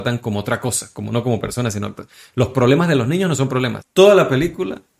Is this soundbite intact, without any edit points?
no; 1 cut; at 3.8 s

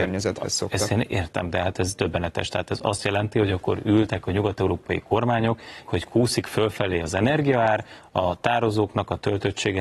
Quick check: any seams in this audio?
yes; 1 cut; at 5.8 s

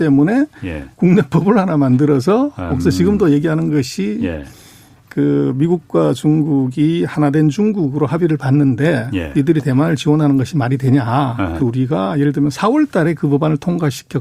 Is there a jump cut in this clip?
yes; 2 cuts; at 2.7 s, 11.6 s

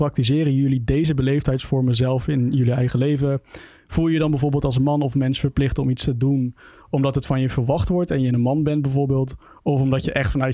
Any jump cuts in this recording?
no; 0 cuts

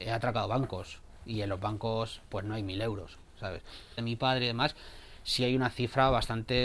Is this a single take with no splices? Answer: no; 1 cut; at 4.0 s

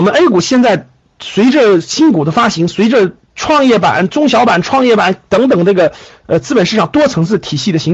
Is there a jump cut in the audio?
no; 0 cuts

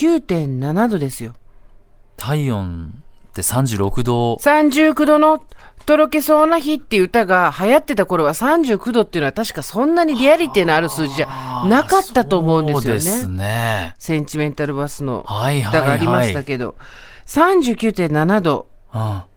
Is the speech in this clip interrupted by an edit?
no; 0 cuts

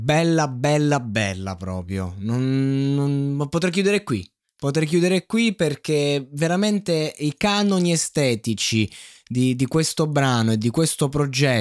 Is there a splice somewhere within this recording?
no; 0 cuts

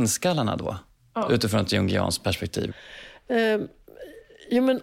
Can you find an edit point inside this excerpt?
no; 0 cuts

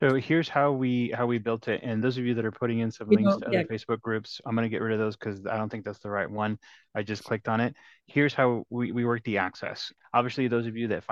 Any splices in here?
yes; 1 cut; at 10.0 s

